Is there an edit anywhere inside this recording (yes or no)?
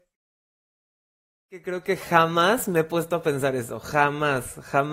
no